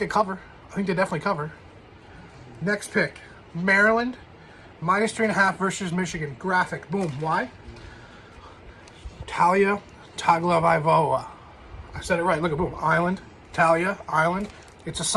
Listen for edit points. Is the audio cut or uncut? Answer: uncut